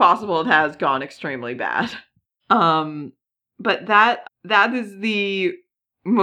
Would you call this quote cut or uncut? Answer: cut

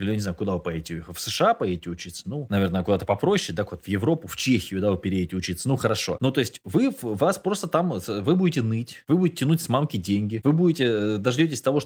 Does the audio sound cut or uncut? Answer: uncut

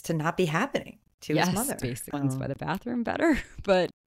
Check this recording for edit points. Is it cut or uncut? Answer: cut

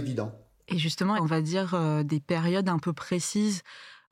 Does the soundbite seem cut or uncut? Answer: cut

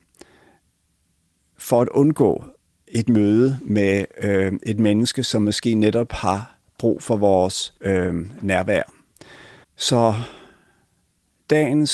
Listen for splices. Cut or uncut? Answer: cut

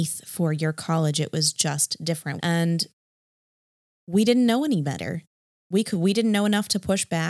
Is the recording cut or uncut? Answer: cut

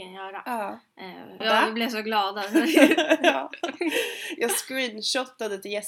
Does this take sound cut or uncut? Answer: cut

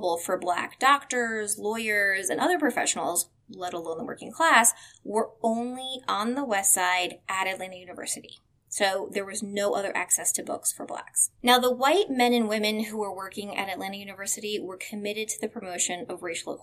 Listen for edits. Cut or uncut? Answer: cut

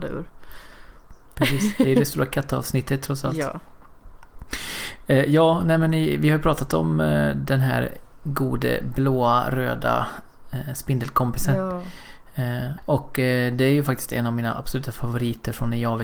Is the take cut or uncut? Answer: cut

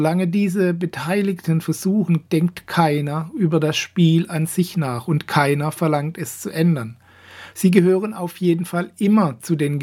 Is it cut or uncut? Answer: cut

